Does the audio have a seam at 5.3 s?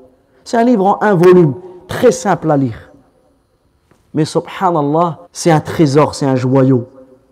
yes; 1 cut; at 5.3 s

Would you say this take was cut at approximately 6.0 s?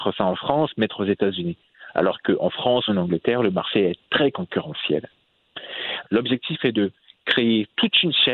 yes; 2 cuts; at 2.9 s, 6.0 s

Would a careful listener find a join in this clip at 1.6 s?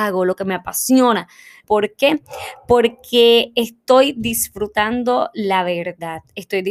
yes; 1 cut; at 1.6 s

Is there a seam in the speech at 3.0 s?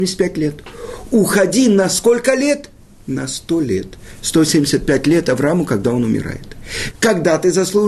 no; 1 cut; at 6.9 s

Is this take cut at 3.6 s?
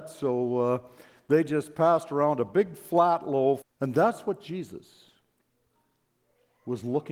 yes; 1 cut; at 3.6 s

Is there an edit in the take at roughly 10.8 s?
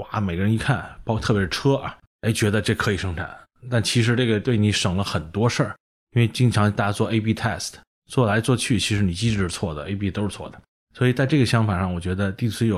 no; 0 cuts

